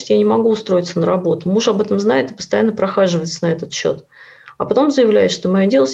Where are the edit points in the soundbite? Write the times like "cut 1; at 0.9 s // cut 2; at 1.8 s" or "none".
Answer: none